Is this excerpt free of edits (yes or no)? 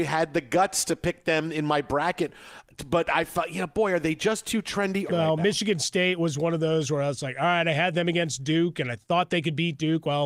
no